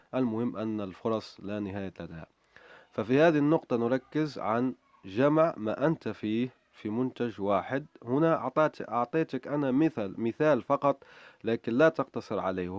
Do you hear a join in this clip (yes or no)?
yes